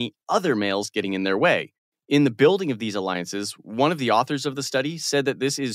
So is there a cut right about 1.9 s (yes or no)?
yes